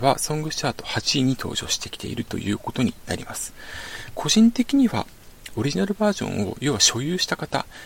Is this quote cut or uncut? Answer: cut